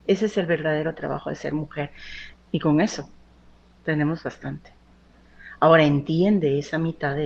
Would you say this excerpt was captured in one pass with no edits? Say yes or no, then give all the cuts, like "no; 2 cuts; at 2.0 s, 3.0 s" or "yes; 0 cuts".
no; 1 cut; at 2.3 s